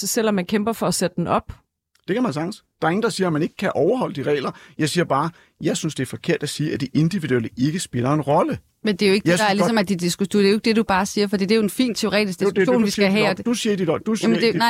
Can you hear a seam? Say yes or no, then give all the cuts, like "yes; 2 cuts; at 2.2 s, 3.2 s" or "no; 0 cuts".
no; 0 cuts